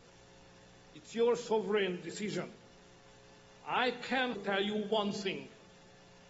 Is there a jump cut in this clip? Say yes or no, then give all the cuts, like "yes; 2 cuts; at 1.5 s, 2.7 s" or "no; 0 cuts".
yes; 1 cut; at 4.3 s